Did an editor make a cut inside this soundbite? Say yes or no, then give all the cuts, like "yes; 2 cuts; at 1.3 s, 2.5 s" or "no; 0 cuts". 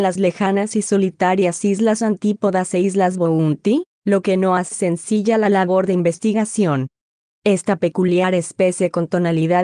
yes; 2 cuts; at 4.7 s, 7.3 s